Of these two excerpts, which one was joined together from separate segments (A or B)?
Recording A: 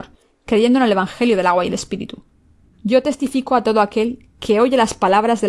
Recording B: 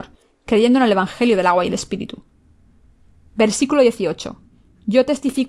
A